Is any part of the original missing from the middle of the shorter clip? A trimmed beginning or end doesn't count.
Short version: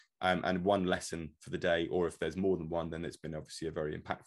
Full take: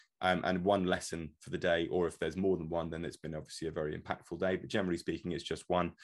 no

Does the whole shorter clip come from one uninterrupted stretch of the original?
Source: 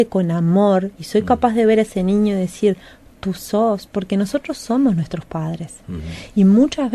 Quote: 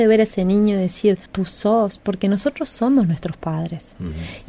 no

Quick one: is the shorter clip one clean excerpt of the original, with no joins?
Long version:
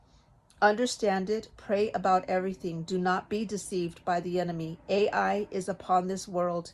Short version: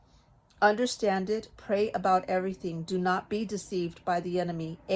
yes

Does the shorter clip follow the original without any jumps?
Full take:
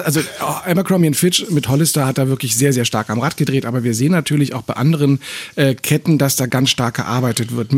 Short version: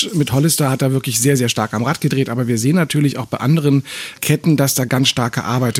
no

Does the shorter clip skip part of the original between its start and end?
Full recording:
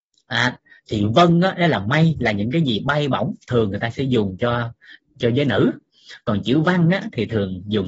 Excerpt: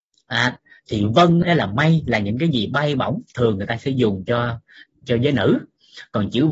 yes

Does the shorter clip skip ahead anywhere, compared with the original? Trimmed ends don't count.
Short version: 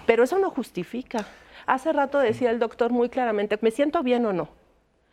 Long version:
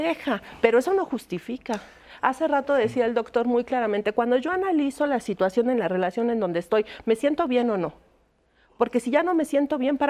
yes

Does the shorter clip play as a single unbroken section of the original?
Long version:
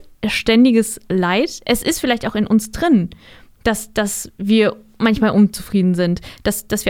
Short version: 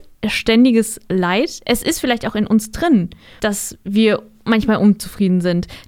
no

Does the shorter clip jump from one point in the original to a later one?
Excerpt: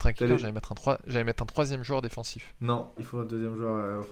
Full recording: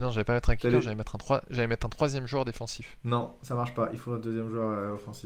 yes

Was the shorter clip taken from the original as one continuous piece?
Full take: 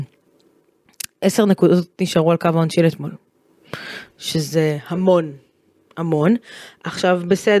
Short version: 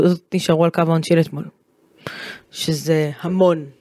yes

